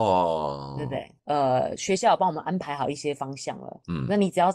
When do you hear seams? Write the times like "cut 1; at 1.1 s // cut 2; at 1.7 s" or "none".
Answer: cut 1; at 1.2 s